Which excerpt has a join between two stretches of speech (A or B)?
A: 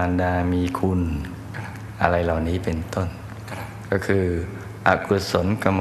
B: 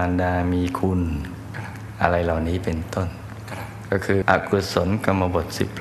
B